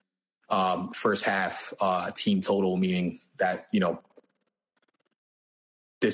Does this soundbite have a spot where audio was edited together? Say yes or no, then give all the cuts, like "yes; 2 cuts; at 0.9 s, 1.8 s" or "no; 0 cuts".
no; 0 cuts